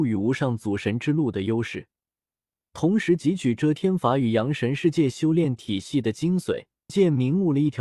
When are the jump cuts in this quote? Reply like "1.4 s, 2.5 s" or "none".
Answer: 6.9 s